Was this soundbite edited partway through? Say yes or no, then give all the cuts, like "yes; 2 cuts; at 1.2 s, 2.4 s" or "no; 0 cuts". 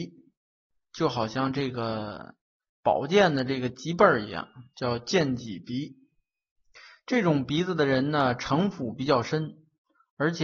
no; 0 cuts